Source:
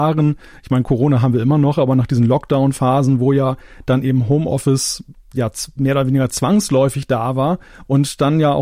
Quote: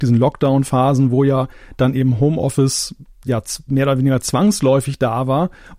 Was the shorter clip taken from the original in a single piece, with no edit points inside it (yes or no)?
yes